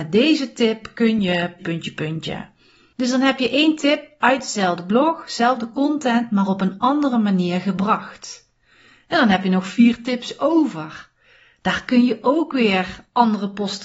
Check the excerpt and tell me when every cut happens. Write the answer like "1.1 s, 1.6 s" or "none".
1.6 s